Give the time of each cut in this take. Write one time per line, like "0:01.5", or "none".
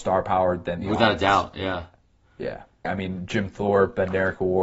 0:02.8